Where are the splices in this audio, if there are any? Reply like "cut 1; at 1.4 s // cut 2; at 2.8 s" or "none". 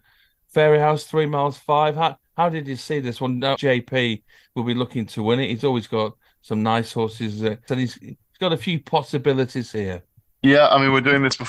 cut 1; at 3.6 s // cut 2; at 7.7 s